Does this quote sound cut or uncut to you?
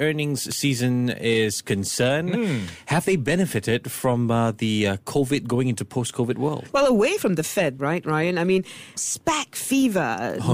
cut